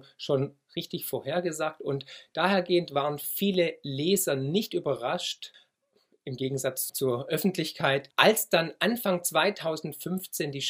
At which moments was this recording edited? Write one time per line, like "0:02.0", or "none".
0:06.9